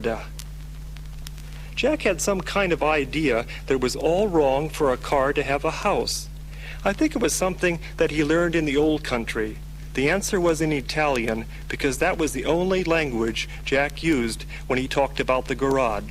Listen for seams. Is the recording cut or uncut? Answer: uncut